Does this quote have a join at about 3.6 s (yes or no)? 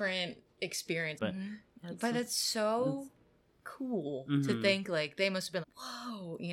no